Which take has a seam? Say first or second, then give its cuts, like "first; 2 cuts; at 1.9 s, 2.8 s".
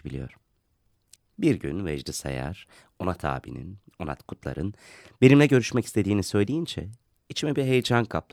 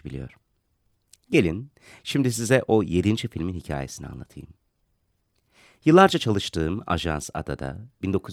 first; 1 cut; at 1.2 s